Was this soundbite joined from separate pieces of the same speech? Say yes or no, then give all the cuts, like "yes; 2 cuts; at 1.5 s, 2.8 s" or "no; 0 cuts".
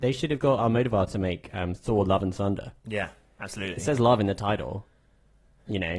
yes; 1 cut; at 2.8 s